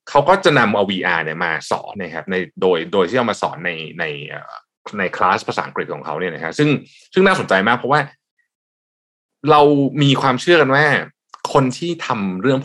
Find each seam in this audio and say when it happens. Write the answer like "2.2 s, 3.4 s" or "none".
1.9 s